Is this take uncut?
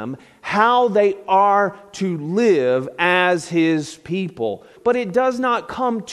no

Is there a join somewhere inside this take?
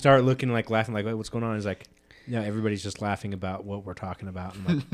no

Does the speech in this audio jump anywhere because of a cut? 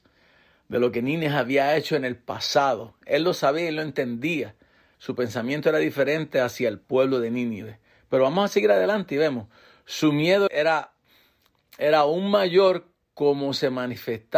yes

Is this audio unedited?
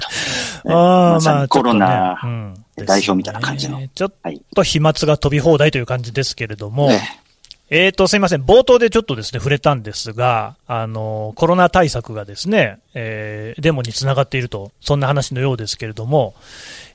no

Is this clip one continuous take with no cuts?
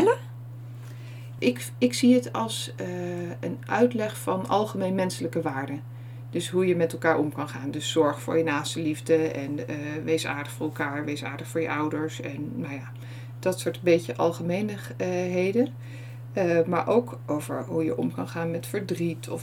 no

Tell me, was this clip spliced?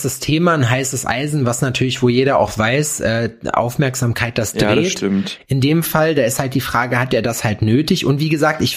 no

